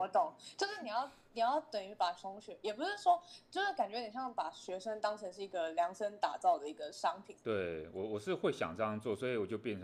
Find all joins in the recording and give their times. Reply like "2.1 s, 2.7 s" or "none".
7.4 s